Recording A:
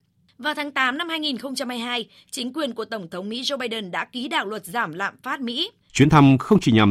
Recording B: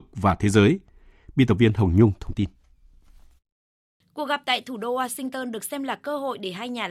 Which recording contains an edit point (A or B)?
A